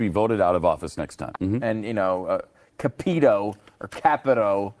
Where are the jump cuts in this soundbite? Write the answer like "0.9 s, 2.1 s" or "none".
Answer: 1.3 s